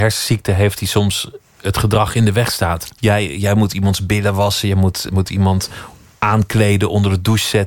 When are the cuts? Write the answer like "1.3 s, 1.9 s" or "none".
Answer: 2.9 s, 5.1 s